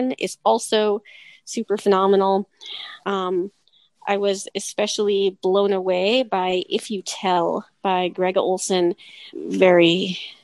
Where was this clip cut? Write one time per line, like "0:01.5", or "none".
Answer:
0:03.0
0:09.3